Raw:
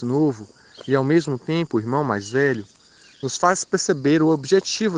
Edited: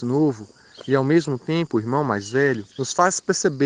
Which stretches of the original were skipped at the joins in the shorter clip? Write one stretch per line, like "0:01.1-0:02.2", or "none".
0:02.7-0:03.2